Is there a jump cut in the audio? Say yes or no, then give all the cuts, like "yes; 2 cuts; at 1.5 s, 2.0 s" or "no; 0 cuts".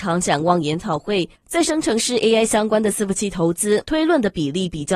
yes; 2 cuts; at 1.4 s, 3.8 s